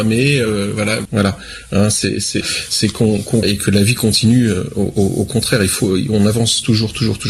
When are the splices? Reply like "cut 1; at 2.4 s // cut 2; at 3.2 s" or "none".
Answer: cut 1; at 1.1 s // cut 2; at 2.4 s // cut 3; at 3.4 s